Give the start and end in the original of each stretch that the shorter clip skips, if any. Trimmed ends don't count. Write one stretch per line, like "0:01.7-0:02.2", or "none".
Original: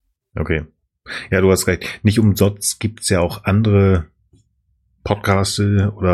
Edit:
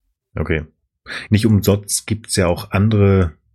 0:01.3-0:02.0